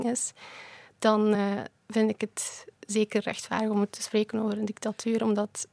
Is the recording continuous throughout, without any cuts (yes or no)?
yes